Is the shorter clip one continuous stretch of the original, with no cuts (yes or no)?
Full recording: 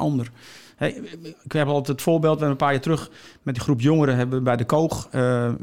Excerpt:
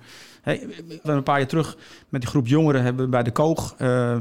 no